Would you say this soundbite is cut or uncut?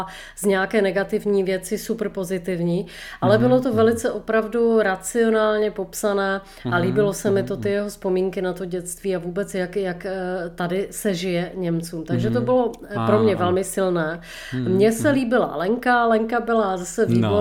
uncut